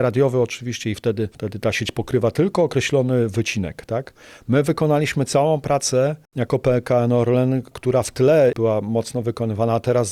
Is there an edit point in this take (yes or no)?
yes